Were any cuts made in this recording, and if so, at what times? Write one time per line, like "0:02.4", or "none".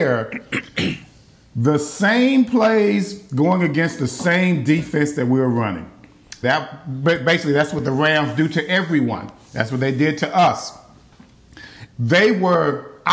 0:06.4
0:11.9